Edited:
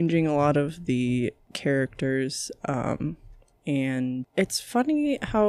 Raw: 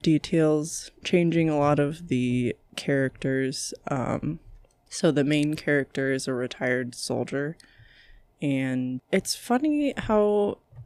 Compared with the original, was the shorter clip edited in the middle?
yes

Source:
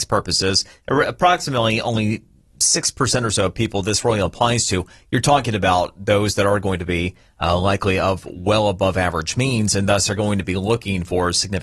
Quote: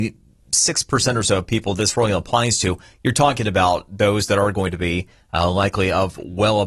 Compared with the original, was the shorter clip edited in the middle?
no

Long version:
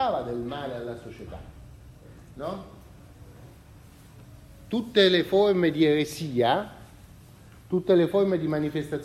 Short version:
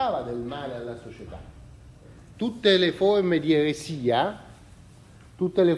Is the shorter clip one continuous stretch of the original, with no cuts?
no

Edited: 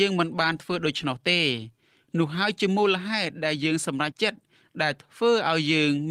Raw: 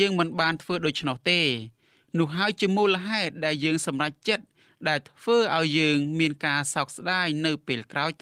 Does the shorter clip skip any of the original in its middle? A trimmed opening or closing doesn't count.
yes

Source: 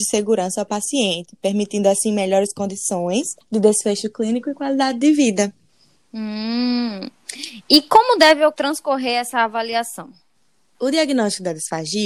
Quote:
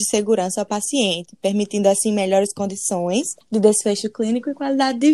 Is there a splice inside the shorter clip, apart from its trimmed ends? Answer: no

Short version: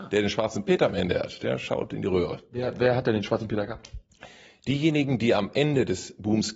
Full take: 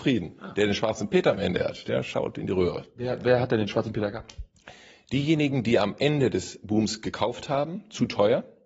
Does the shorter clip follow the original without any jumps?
yes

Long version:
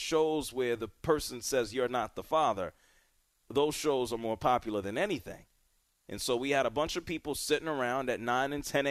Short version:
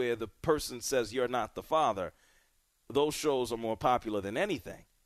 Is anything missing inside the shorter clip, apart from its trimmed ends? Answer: no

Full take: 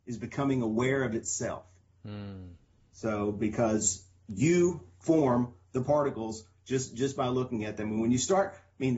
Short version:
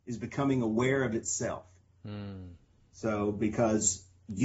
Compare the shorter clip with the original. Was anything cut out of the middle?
no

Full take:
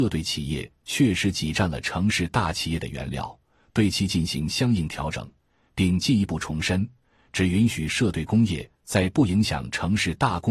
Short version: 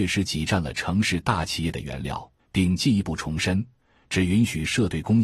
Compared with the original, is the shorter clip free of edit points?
no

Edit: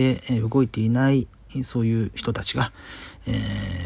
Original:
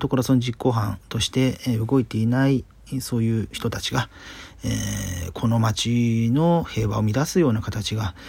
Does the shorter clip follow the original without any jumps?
yes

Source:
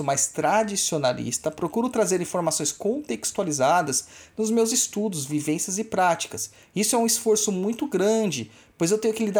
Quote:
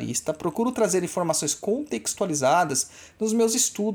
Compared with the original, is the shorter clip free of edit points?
yes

